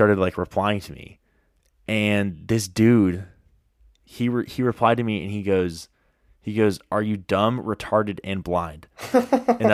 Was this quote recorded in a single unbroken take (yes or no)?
yes